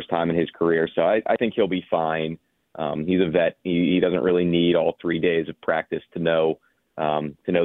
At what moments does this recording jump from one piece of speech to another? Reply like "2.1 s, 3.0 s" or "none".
none